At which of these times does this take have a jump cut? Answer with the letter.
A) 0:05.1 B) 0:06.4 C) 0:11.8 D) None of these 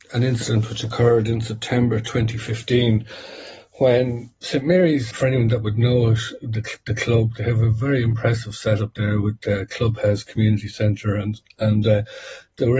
A